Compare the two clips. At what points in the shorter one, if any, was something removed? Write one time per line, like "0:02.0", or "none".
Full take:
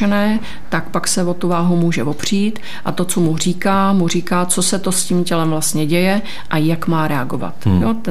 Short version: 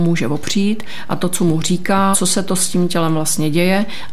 0:02.1

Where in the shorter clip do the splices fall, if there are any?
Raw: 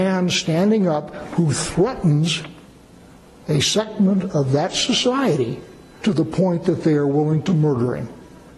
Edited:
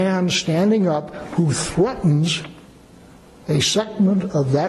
none

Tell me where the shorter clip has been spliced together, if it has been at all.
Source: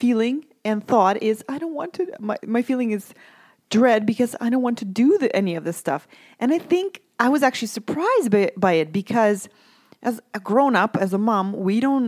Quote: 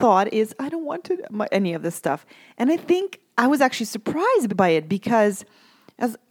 0:01.5
0:04.5

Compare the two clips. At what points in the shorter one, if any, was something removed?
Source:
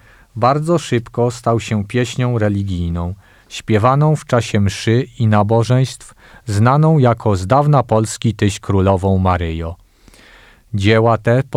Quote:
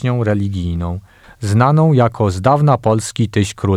0:01.2

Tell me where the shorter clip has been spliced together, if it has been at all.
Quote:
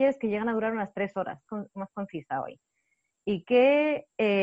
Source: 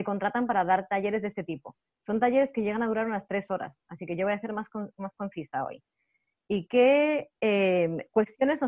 0:01.5

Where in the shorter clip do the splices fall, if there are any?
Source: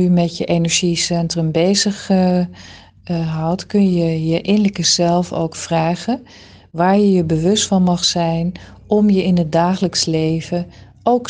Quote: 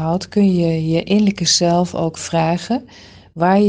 none

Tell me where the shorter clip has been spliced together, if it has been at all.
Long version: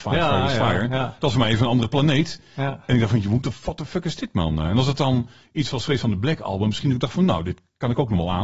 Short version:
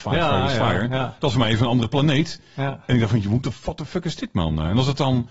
none

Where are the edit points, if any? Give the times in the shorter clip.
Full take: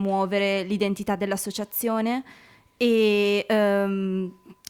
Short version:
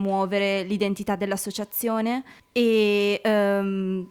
0:02.4

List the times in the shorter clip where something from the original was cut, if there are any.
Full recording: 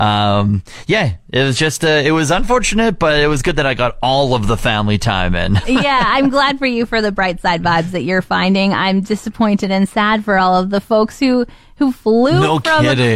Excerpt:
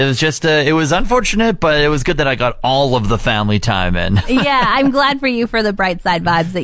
none

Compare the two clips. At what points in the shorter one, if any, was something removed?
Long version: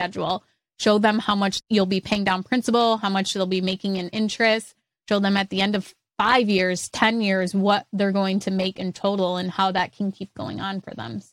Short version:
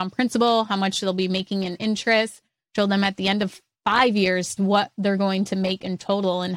0:04.6

